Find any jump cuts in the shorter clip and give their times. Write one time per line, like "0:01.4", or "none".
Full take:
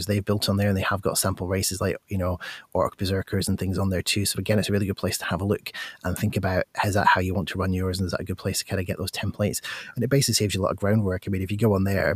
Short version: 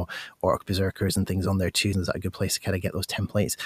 0:01.9